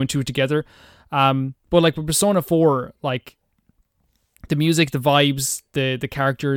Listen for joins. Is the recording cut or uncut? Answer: uncut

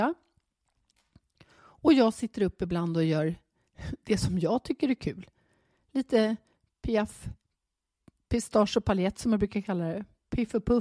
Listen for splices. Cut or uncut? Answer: uncut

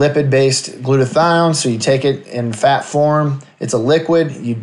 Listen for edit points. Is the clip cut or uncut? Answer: uncut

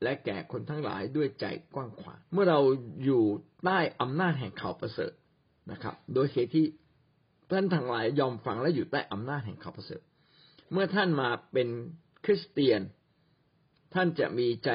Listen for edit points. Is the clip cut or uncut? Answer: cut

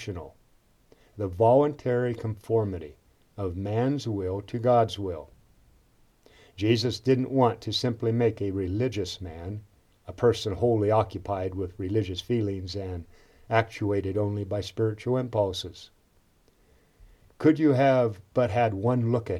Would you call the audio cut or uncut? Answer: uncut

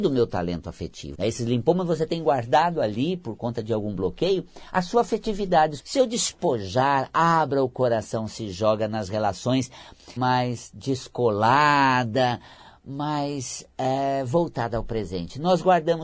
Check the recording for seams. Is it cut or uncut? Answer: cut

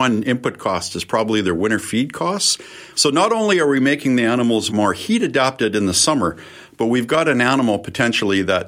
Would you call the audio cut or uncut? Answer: cut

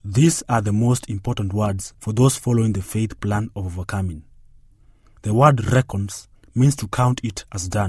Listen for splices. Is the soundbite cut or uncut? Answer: uncut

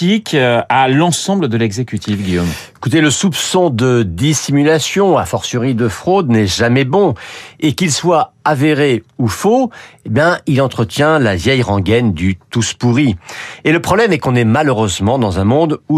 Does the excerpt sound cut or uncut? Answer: uncut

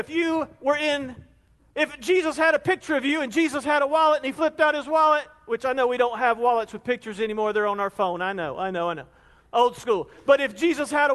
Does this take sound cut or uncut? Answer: uncut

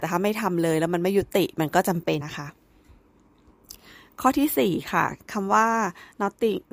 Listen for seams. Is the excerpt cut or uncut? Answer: cut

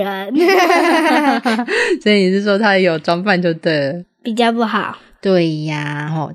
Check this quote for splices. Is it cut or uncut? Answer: cut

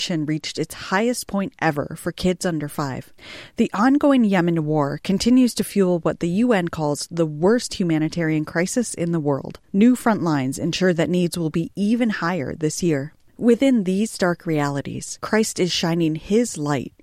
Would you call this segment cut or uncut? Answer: uncut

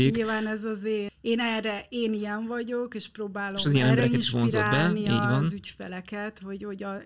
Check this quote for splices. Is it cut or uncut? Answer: cut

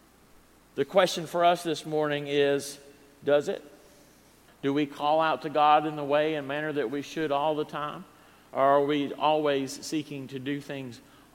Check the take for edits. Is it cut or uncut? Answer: cut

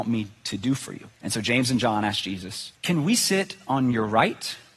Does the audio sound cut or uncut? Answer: cut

